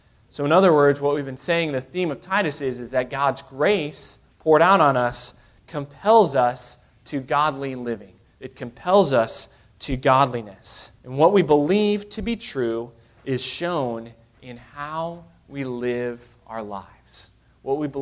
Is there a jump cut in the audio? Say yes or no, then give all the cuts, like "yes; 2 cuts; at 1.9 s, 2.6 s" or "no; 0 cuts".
yes; 1 cut; at 11.0 s